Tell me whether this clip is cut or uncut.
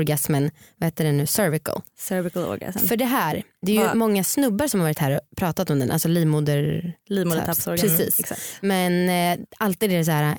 uncut